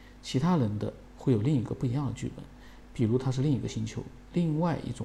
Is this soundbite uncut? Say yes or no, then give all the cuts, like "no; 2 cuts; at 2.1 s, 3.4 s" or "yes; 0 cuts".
yes; 0 cuts